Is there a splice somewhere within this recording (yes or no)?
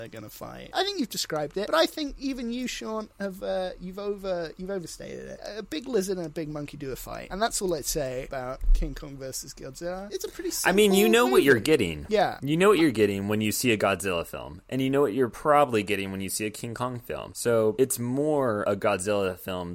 no